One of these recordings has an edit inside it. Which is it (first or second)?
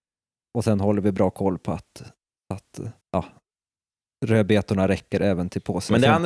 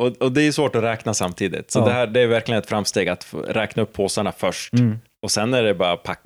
first